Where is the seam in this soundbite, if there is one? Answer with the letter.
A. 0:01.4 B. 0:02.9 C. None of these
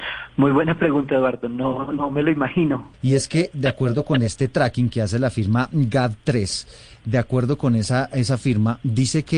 B